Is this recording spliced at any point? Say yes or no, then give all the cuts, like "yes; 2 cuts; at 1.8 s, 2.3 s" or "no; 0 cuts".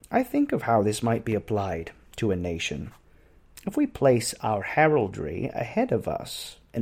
no; 0 cuts